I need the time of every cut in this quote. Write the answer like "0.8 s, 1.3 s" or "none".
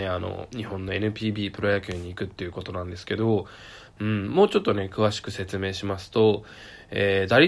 none